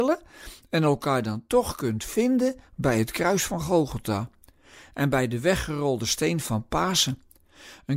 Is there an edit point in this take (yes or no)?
no